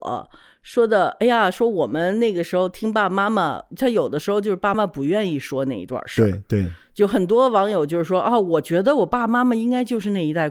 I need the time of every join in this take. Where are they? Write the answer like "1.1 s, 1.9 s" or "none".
4.7 s